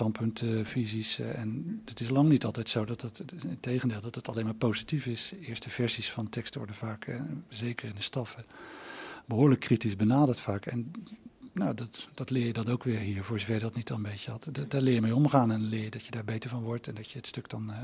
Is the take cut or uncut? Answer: uncut